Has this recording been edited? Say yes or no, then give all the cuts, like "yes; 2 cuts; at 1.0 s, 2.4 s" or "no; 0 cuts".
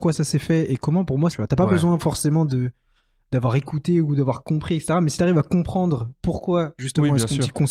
yes; 1 cut; at 1.3 s